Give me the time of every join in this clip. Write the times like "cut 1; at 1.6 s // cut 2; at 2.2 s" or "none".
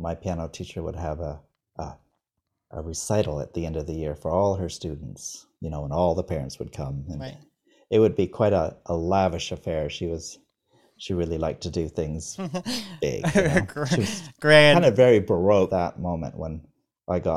cut 1; at 15.7 s